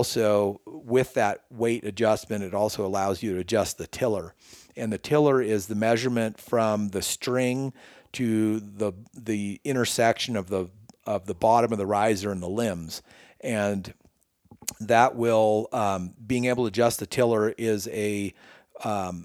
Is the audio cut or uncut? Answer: uncut